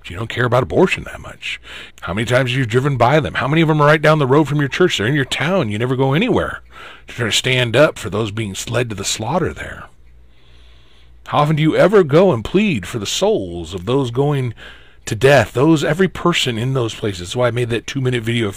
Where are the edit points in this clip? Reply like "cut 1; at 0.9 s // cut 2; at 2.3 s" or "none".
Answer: cut 1; at 1.9 s